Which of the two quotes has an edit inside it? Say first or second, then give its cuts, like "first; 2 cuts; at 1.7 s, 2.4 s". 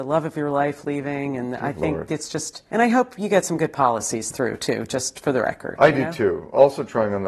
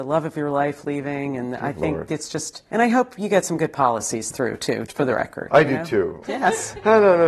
second; 2 cuts; at 4.9 s, 6.2 s